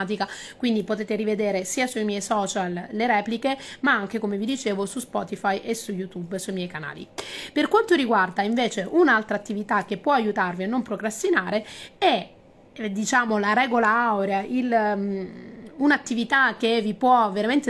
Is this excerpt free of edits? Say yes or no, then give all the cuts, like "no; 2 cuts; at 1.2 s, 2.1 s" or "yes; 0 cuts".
yes; 0 cuts